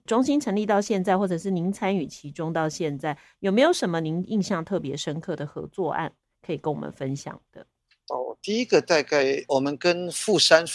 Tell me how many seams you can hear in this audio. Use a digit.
1